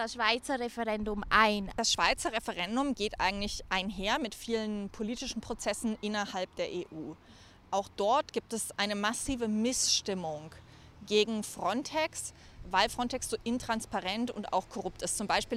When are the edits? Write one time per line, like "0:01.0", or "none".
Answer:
none